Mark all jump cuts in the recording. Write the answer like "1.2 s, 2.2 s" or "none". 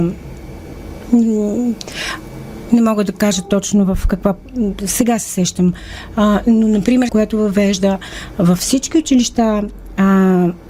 7.1 s